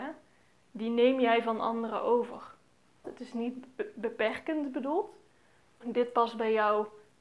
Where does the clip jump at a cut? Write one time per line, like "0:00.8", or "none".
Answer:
0:03.0
0:05.8